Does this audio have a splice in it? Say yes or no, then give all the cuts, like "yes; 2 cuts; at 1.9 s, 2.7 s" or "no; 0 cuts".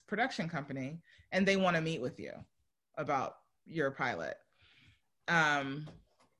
no; 0 cuts